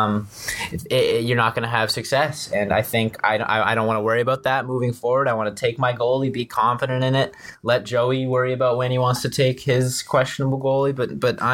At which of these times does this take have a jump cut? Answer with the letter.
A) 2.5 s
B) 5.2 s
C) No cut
C